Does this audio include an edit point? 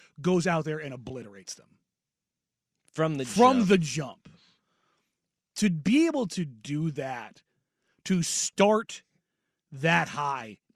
no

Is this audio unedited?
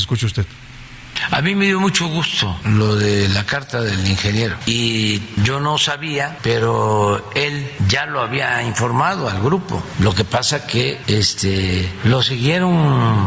yes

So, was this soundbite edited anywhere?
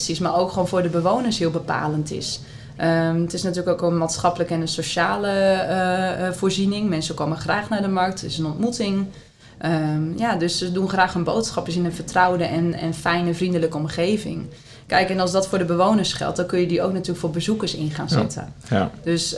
no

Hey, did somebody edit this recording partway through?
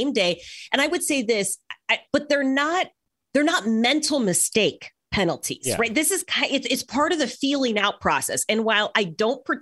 yes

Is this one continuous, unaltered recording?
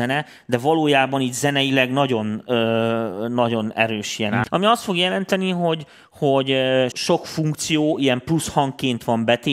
no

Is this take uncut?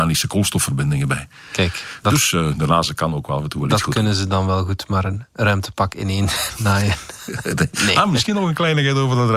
yes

